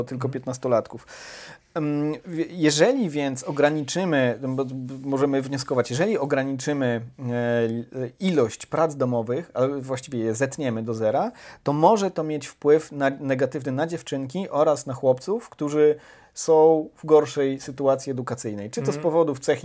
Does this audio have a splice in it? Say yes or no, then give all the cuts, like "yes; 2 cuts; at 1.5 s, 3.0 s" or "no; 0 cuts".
no; 0 cuts